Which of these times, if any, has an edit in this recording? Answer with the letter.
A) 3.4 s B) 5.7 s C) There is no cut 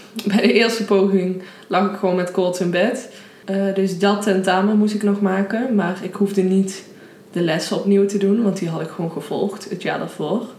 A